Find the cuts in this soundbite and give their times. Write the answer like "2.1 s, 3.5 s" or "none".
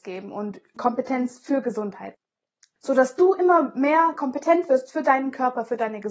none